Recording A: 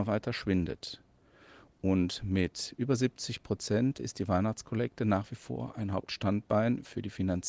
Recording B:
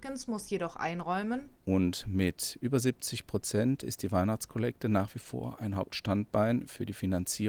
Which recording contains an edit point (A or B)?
B